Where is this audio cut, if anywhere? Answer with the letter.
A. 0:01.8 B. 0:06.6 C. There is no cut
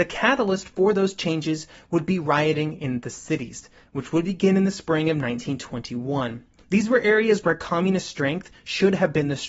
B